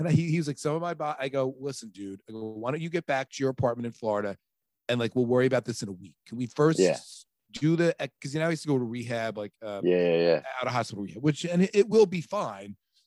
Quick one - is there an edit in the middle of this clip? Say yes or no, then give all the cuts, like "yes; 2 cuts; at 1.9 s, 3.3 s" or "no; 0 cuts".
no; 0 cuts